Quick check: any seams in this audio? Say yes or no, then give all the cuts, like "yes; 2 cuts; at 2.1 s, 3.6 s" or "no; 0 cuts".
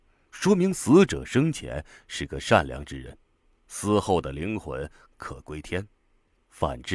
no; 0 cuts